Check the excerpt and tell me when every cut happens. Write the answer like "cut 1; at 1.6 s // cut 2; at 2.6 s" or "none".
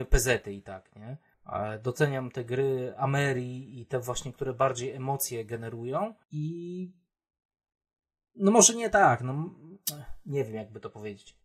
cut 1; at 1.3 s // cut 2; at 6.2 s